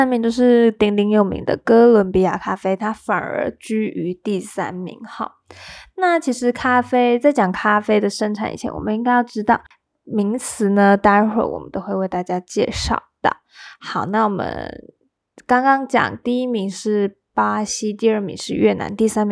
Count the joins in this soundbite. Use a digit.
0